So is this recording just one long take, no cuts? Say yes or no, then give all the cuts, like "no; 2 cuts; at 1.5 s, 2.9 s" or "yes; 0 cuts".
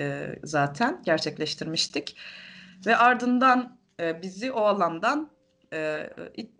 yes; 0 cuts